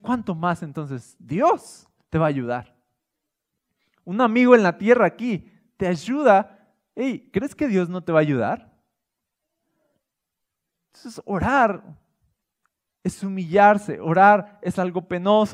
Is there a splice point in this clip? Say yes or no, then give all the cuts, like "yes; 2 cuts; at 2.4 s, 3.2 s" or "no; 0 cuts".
no; 0 cuts